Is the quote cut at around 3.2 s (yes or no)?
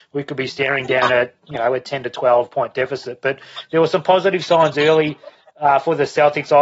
no